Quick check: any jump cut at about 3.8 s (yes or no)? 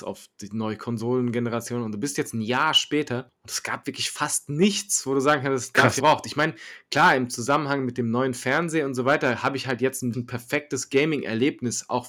no